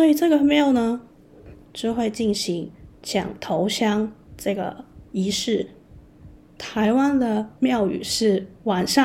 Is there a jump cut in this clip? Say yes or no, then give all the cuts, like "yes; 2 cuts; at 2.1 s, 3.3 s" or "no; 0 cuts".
yes; 2 cuts; at 1.6 s, 6.5 s